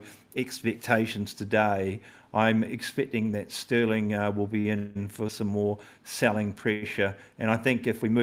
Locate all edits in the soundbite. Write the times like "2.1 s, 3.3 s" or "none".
none